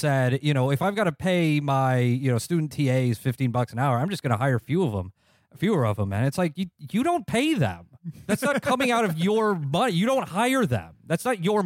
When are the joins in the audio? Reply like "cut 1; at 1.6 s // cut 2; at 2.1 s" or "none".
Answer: none